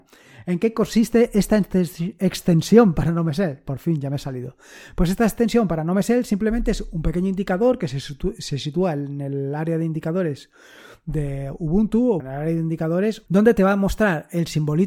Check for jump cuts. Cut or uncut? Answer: cut